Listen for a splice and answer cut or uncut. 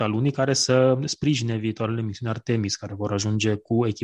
uncut